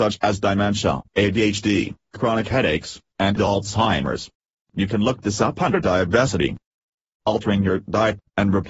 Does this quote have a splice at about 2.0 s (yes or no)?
no